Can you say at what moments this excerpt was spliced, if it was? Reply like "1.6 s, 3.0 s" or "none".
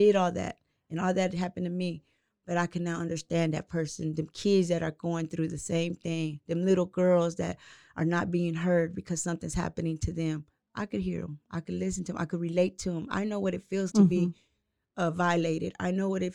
13.9 s